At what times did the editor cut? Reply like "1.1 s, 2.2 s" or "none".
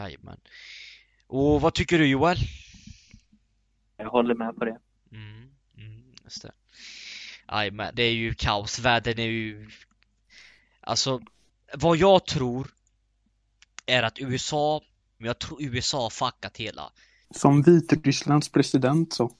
7.9 s, 15.2 s, 17.2 s